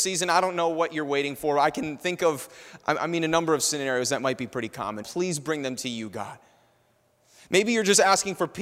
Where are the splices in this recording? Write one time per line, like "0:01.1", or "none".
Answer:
0:05.0